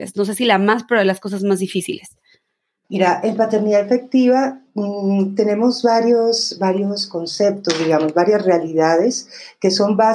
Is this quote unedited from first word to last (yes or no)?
yes